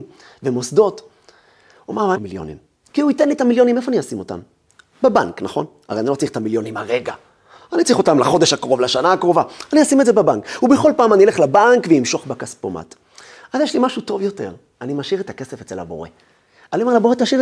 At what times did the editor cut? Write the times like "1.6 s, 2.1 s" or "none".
2.1 s